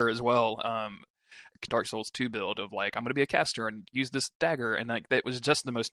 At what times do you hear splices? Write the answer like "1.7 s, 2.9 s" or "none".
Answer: 1.7 s